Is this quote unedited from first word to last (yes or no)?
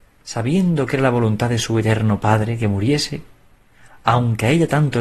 yes